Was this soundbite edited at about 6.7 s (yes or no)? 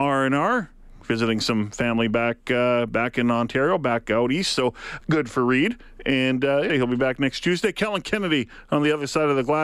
yes